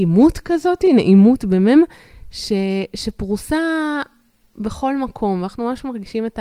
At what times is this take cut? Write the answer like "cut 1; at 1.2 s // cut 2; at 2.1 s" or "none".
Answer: none